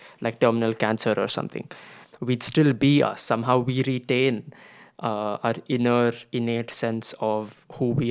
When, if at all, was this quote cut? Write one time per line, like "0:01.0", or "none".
0:02.0